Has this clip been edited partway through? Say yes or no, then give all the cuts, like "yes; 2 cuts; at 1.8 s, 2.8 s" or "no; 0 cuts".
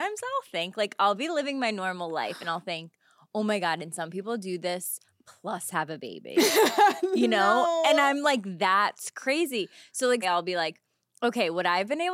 yes; 1 cut; at 10.2 s